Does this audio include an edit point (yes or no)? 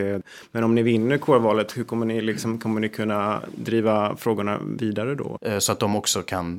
yes